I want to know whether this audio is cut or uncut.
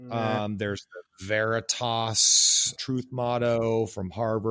cut